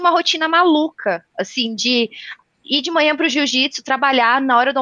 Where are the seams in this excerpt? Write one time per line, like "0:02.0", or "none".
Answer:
none